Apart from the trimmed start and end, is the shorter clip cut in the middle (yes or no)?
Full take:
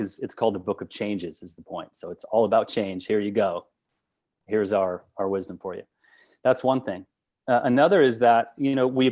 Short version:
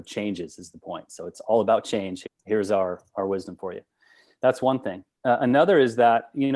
yes